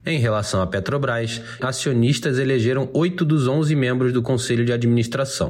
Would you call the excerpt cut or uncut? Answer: cut